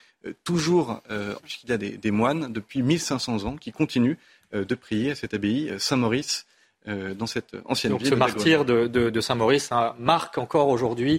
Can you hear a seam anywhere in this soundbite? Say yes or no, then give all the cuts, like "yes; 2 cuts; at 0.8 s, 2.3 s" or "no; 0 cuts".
yes; 1 cut; at 1.4 s